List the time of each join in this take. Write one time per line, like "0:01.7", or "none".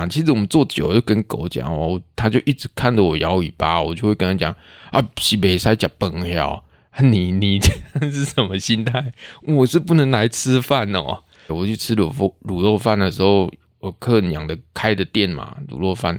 0:11.5